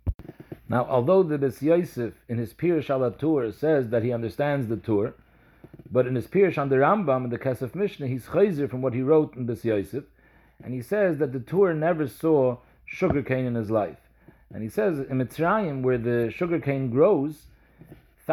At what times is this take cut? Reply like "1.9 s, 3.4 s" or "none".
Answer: none